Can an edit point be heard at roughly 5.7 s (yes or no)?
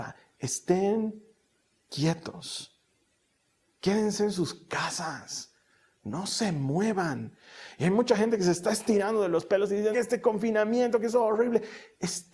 no